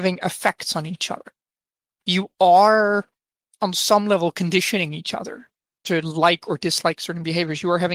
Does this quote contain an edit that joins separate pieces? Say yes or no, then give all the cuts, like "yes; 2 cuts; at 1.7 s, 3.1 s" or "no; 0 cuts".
no; 0 cuts